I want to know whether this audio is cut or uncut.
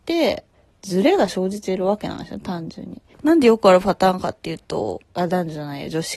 cut